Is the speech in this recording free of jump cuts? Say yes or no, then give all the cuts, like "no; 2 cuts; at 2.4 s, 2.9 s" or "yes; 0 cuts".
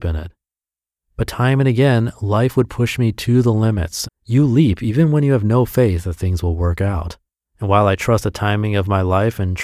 no; 2 cuts; at 4.0 s, 7.4 s